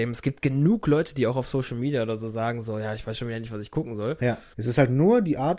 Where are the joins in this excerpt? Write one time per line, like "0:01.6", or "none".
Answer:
0:04.5